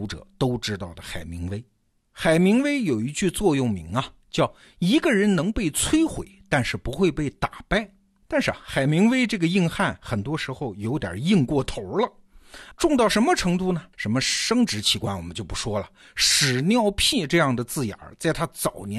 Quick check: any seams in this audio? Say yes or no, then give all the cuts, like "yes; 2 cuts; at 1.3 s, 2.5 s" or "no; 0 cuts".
yes; 3 cuts; at 8.2 s, 12.7 s, 13.9 s